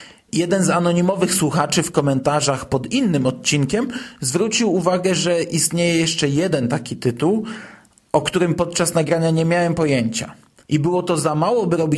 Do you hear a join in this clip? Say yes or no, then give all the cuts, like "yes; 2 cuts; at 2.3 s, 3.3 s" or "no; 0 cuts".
yes; 1 cut; at 10.6 s